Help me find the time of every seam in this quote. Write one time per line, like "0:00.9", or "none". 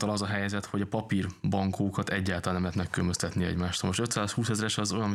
none